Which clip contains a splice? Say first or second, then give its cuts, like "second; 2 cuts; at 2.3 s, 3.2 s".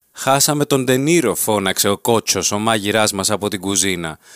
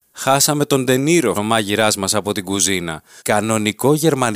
second; 2 cuts; at 1.3 s, 3.2 s